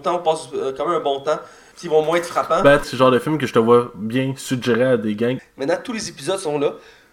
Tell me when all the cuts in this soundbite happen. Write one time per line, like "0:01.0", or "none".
0:01.7
0:02.8
0:05.4